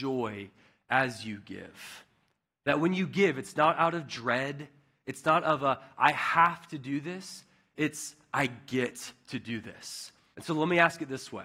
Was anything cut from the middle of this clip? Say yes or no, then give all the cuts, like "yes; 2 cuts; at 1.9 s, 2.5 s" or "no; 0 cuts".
yes; 1 cut; at 10.3 s